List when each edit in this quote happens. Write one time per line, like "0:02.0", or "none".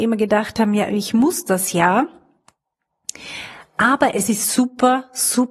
none